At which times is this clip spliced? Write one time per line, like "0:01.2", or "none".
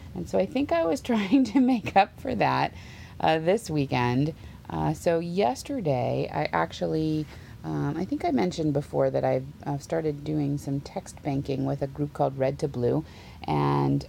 none